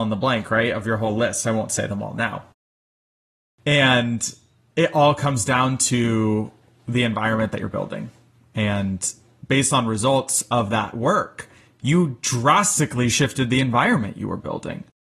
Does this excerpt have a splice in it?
no; 0 cuts

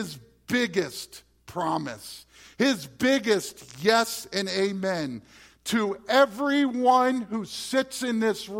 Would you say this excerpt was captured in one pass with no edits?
yes; 0 cuts

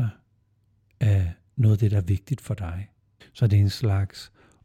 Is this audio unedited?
no; 1 cut; at 3.2 s

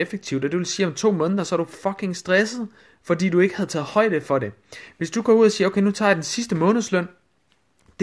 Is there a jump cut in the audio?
no; 0 cuts

